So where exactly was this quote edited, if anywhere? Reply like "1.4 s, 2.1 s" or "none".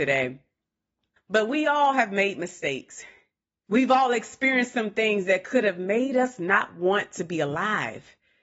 1.2 s, 3.7 s